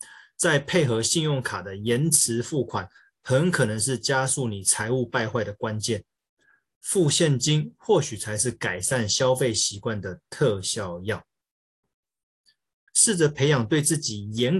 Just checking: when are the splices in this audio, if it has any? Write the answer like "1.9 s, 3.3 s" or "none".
12.9 s